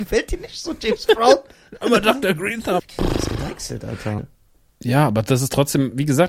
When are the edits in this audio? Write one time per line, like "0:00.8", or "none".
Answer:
0:02.8
0:04.2